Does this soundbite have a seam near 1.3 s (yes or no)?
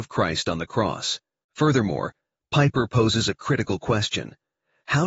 yes